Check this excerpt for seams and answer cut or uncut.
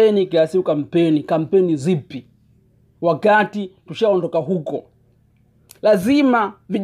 uncut